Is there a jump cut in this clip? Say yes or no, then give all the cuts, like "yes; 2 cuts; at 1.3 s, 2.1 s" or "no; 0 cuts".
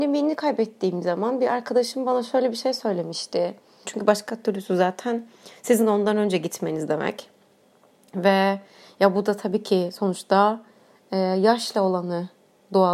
yes; 1 cut; at 3.9 s